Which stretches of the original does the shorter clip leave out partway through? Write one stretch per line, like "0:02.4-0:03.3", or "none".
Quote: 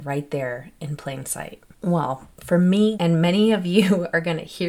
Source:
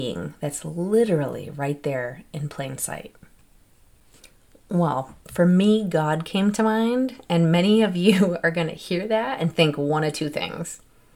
0:03.2-0:04.6
0:05.8-0:07.2